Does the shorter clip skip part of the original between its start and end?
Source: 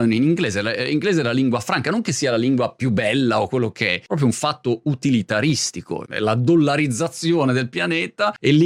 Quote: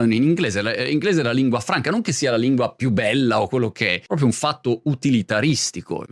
no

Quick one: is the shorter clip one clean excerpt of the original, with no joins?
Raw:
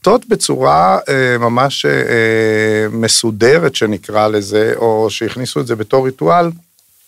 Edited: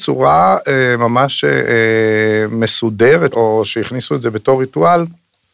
no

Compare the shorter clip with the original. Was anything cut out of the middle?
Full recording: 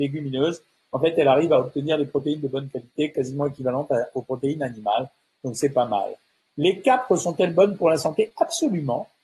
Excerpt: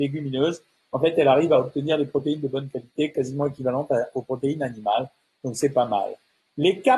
no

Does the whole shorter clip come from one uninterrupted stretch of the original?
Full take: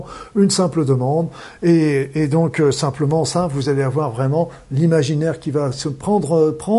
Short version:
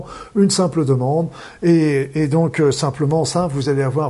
yes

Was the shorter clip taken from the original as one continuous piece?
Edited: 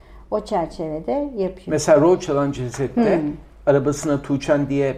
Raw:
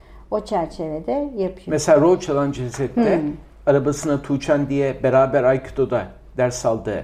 yes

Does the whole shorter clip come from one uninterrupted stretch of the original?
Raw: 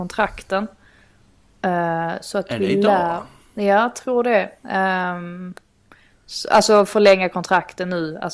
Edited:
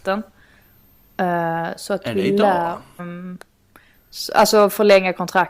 no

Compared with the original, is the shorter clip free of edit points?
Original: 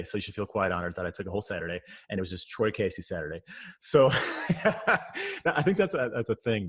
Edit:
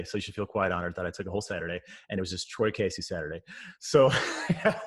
yes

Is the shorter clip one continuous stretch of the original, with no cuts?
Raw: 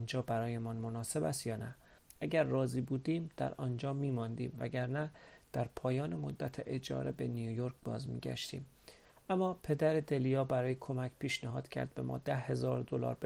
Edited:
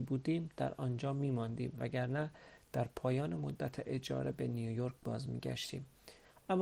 yes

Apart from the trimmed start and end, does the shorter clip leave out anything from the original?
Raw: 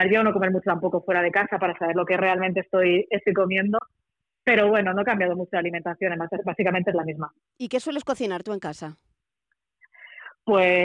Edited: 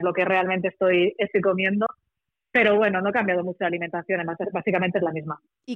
no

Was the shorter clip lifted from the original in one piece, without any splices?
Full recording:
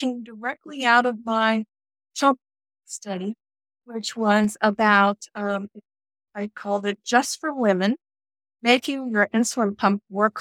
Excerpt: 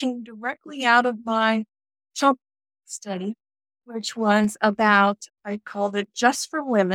no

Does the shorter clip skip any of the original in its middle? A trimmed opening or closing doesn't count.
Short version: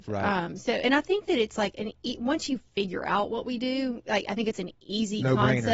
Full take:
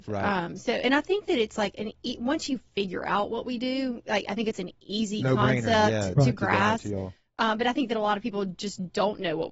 no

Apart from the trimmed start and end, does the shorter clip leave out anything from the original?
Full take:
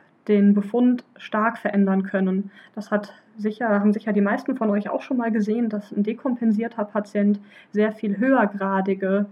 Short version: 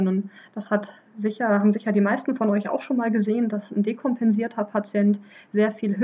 no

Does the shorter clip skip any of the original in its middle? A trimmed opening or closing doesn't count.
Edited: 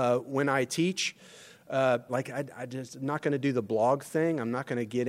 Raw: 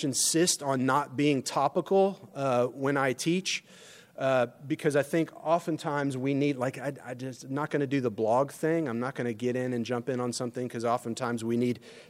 yes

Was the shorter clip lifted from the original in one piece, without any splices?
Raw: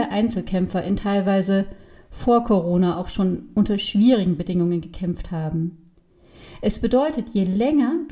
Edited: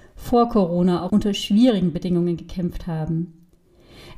no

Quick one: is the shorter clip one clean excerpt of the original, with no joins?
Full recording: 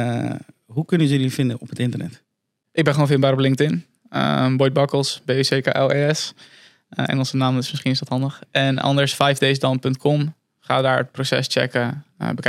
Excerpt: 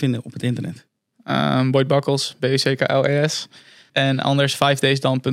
no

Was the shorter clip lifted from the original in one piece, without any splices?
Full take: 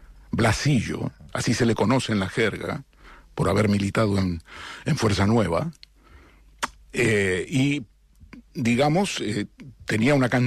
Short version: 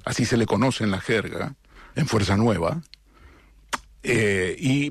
no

